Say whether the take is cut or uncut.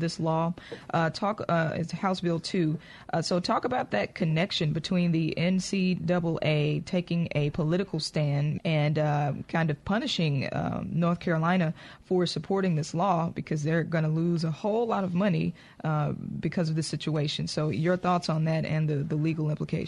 cut